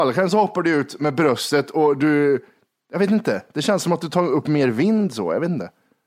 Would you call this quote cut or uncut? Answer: uncut